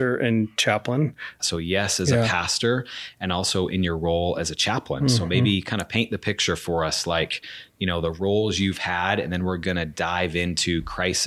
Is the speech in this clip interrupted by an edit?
yes; 1 cut; at 1.4 s

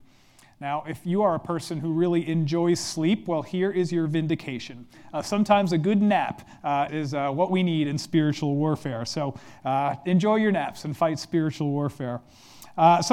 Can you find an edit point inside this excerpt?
yes; 1 cut; at 6.9 s

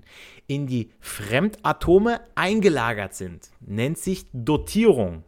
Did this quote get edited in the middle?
no; 0 cuts

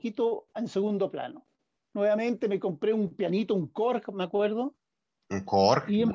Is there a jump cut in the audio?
yes; 1 cut; at 1.8 s

